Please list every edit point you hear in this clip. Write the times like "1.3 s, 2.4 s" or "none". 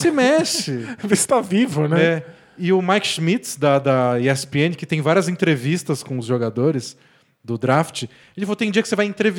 none